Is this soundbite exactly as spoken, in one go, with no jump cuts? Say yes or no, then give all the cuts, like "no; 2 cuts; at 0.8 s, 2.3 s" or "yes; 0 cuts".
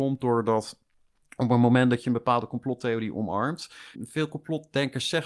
no; 1 cut; at 3.9 s